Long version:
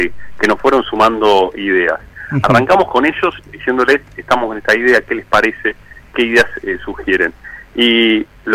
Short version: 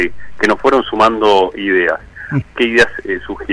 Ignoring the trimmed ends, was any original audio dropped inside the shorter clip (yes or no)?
yes